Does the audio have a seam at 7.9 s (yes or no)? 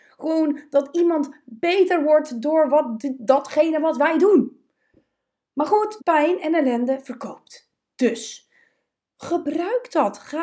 no